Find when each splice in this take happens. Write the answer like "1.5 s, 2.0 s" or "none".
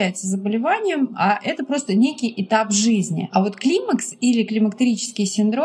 none